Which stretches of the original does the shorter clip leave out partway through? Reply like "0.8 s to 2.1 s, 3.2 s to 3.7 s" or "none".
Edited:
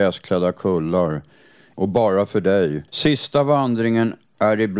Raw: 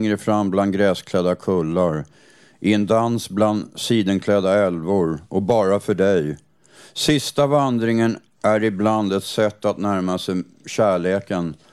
2.6 s to 5.3 s, 6.4 s to 6.9 s